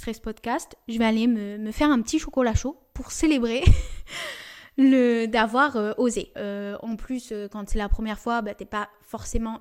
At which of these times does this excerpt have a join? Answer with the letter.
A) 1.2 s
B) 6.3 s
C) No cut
B